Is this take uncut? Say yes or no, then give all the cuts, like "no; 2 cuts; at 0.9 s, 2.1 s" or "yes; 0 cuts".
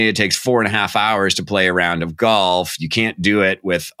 yes; 0 cuts